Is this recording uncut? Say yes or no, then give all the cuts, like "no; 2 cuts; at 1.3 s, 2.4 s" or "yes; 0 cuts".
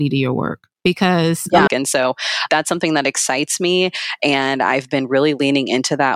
no; 1 cut; at 1.7 s